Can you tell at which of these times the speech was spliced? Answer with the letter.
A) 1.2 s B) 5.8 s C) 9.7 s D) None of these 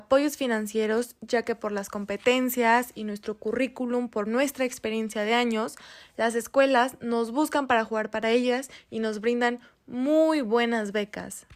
D